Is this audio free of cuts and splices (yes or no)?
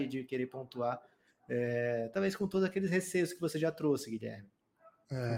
yes